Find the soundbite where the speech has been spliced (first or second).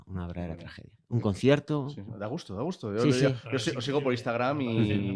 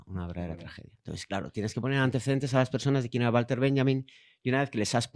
first